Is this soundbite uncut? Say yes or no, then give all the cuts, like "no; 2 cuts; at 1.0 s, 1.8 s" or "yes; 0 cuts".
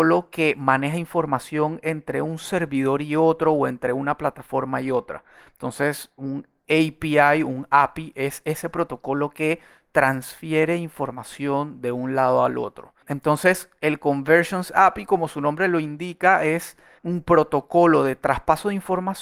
yes; 0 cuts